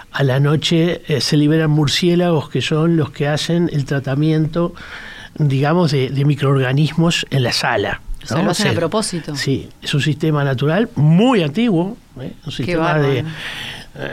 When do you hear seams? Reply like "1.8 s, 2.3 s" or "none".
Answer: none